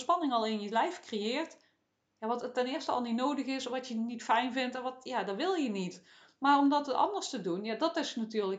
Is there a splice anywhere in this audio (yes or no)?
no